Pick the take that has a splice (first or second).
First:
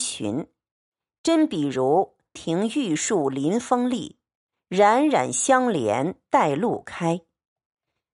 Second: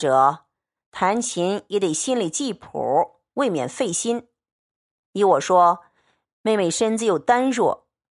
first